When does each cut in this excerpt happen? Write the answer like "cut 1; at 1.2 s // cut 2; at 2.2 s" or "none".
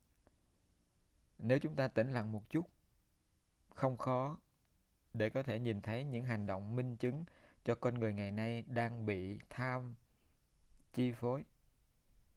none